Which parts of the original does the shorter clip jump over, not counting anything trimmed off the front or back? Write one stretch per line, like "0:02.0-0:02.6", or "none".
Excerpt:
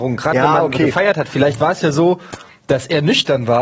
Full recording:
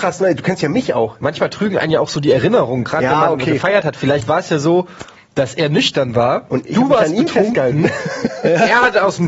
none